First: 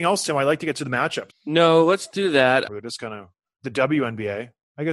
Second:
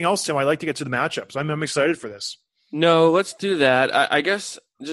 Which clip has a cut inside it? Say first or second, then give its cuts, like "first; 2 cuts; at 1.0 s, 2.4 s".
first; 2 cuts; at 1.3 s, 2.6 s